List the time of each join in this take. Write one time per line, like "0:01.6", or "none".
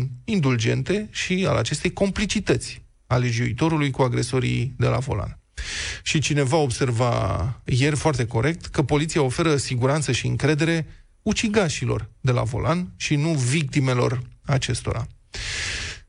0:07.7